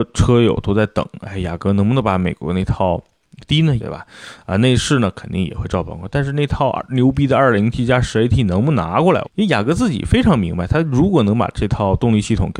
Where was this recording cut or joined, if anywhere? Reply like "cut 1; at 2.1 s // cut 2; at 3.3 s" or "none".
cut 1; at 3.8 s // cut 2; at 9.2 s